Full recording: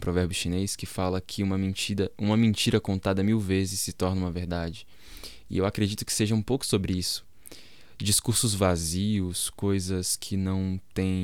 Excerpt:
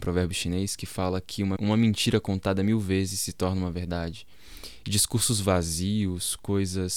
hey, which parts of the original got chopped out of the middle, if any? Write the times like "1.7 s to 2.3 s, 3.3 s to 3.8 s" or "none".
1.6 s to 2.2 s, 5.4 s to 8.0 s